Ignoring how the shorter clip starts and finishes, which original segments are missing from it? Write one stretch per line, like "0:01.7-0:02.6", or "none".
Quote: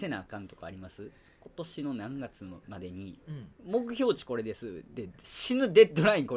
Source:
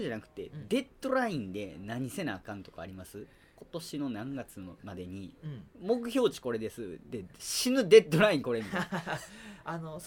none